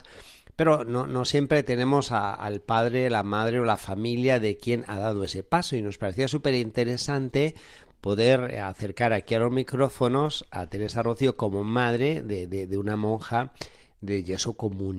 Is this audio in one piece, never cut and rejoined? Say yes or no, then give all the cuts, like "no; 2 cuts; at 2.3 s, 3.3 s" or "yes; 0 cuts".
yes; 0 cuts